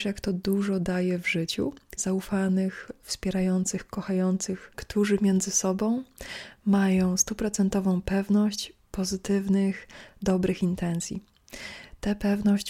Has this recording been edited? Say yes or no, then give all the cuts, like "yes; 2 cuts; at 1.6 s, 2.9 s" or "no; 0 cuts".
yes; 2 cuts; at 2.0 s, 4.7 s